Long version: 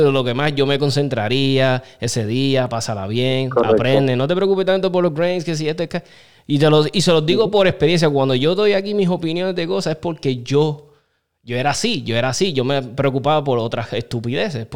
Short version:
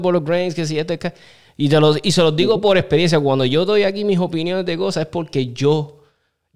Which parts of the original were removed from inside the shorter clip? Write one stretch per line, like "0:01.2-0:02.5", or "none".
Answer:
none